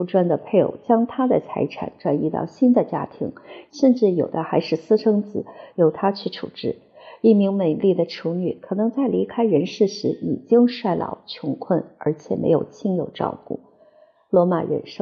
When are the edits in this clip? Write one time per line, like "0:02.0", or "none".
0:03.7
0:05.7

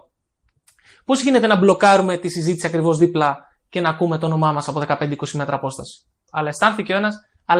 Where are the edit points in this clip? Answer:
0:06.3

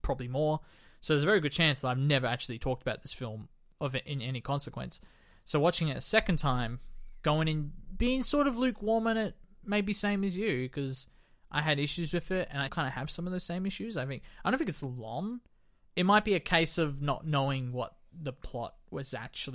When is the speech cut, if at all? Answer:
0:12.7

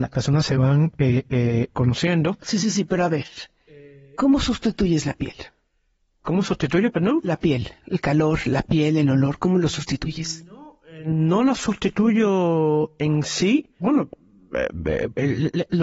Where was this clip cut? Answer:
0:01.7
0:13.8

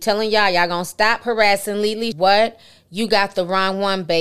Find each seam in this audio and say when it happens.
0:02.1

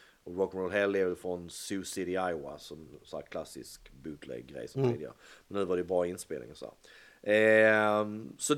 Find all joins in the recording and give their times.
none

